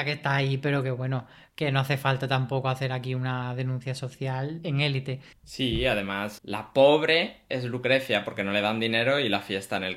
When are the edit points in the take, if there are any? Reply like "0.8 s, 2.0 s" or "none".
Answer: 5.3 s, 6.4 s